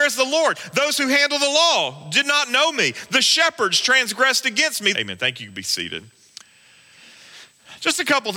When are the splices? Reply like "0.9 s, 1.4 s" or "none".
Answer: 4.9 s